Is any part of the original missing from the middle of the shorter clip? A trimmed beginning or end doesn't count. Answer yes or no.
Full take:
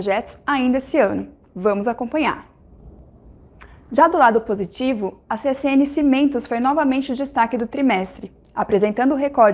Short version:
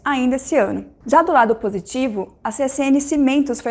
yes